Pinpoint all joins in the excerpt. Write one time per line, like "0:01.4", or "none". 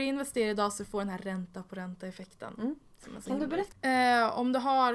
0:03.7